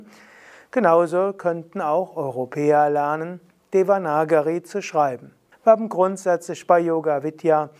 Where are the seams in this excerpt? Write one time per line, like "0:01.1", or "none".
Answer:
0:05.5